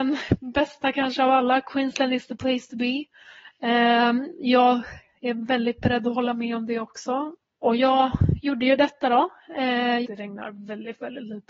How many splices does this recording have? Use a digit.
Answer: 2